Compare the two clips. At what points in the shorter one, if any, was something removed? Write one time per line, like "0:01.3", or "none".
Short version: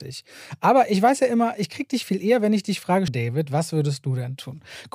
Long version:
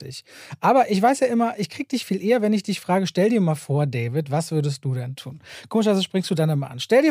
0:03.1